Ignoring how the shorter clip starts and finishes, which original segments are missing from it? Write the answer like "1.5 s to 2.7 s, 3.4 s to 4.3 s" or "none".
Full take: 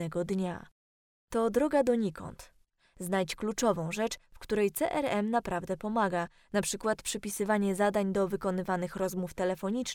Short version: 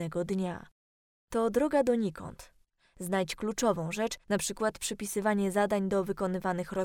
4.2 s to 6.5 s